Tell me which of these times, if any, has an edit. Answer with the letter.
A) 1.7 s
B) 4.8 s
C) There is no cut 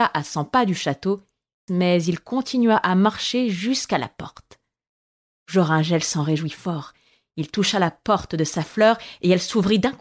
A